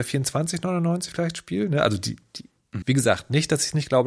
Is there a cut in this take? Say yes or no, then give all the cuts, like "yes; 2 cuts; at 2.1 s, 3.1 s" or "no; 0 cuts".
yes; 1 cut; at 2.8 s